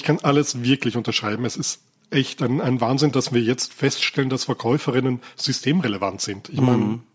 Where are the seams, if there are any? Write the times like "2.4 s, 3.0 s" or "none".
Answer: none